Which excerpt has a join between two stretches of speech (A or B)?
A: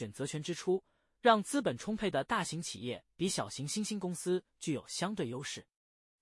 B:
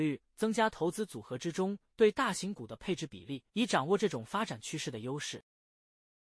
B